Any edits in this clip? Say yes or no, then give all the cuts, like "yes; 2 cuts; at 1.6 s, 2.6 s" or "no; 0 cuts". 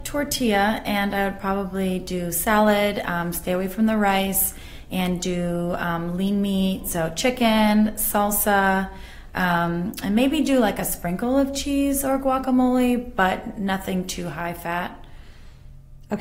no; 0 cuts